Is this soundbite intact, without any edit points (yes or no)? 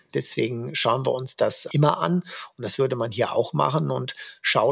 no